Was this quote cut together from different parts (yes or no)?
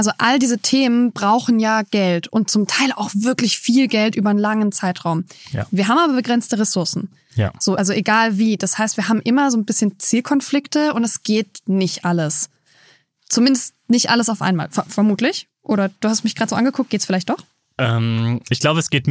no